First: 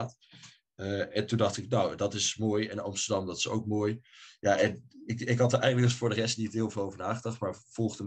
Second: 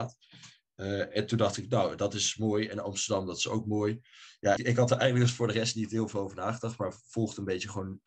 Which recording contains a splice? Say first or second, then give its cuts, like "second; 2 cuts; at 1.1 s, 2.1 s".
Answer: second; 1 cut; at 4.6 s